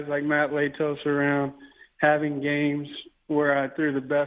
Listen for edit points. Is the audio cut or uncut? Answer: uncut